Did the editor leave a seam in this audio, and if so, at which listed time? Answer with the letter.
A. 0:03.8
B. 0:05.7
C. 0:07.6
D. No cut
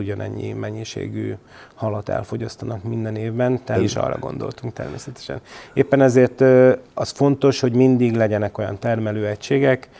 A